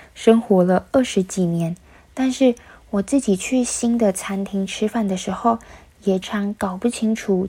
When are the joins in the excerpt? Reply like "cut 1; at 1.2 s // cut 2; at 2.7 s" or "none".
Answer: cut 1; at 6.2 s